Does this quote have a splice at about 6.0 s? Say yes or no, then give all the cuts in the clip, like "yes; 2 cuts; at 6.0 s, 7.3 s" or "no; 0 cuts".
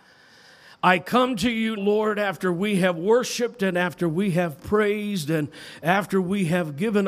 no; 1 cut; at 1.8 s